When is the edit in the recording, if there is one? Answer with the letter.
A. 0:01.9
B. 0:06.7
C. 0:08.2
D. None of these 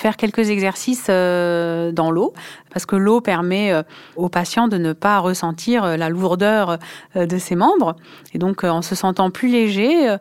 D